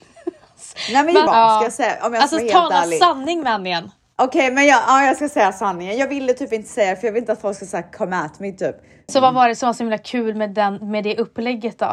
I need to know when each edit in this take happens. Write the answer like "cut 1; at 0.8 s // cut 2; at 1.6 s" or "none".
cut 1; at 1.3 s // cut 2; at 9.1 s